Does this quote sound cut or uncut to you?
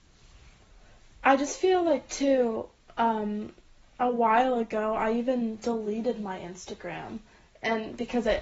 uncut